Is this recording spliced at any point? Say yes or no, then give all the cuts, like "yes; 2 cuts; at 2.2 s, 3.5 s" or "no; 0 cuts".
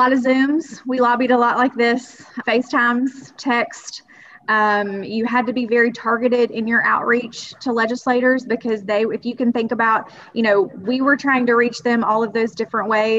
yes; 1 cut; at 2.4 s